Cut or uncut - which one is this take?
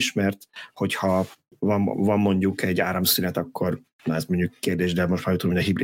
uncut